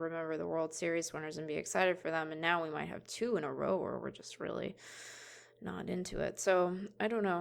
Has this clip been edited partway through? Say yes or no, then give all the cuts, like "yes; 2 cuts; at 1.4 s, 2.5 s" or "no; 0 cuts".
no; 0 cuts